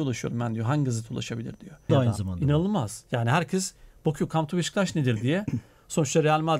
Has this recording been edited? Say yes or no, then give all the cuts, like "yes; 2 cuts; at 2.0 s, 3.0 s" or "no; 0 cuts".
yes; 1 cut; at 1.9 s